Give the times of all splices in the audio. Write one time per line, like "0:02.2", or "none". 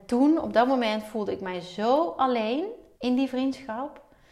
0:02.9